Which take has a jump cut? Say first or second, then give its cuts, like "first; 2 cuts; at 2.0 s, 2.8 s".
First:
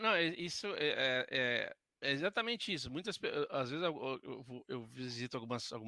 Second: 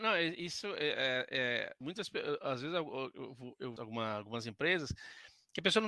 second; 2 cuts; at 1.8 s, 3.8 s